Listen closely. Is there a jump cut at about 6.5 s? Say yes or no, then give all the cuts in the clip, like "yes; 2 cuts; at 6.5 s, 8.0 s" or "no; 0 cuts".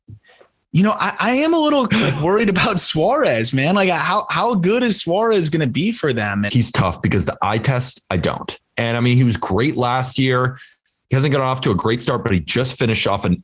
yes; 2 cuts; at 6.5 s, 8.7 s